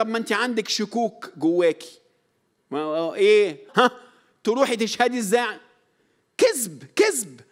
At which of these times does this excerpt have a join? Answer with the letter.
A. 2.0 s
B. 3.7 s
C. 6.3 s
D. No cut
B